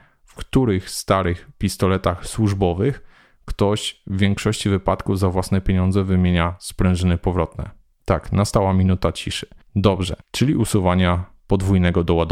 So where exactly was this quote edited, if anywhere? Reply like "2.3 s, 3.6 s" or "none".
10.2 s